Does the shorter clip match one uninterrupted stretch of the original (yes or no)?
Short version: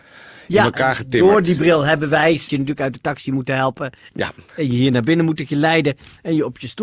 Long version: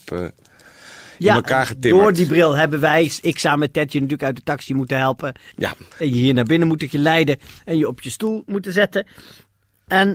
no